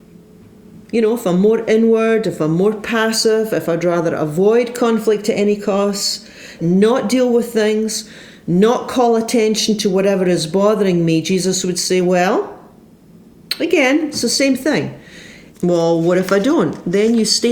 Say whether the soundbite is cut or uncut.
cut